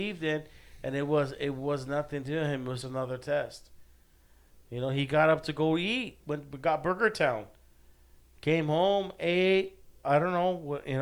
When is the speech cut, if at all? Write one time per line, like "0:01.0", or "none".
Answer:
0:02.8
0:06.2